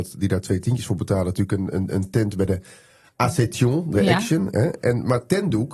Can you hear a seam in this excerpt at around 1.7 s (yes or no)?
yes